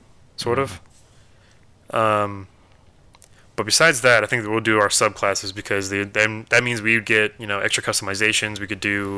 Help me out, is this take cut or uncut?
uncut